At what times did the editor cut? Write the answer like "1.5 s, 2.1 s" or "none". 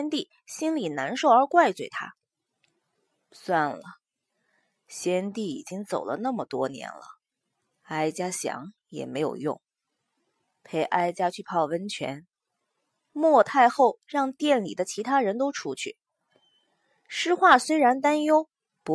none